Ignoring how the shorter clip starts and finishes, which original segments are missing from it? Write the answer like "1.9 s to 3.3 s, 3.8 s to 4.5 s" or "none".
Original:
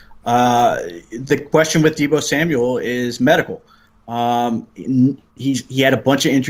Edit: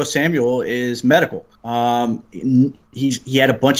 3.7 s to 4.0 s